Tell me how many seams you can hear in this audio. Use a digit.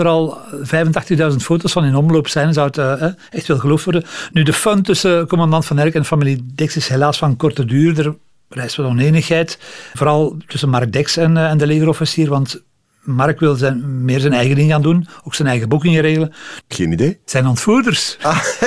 2